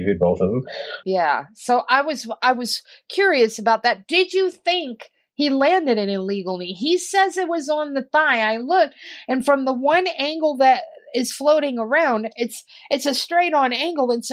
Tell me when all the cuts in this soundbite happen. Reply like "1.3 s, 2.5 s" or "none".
1.0 s